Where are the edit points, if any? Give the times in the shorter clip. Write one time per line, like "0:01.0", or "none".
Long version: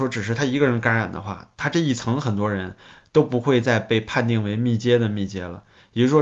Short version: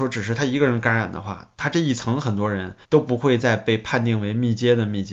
0:02.8